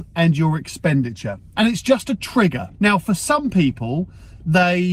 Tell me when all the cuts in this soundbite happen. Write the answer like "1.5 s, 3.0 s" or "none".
1.5 s, 2.7 s